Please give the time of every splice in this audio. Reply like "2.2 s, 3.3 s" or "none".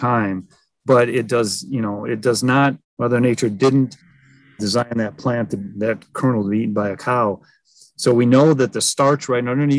2.8 s